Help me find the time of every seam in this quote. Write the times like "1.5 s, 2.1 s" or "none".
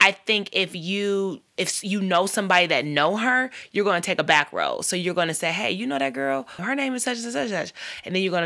6.6 s